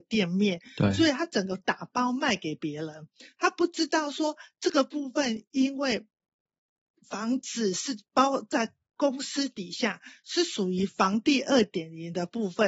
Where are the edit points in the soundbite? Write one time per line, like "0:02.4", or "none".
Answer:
none